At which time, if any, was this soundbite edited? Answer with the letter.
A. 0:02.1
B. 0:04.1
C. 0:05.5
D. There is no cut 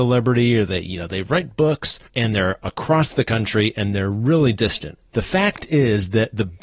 A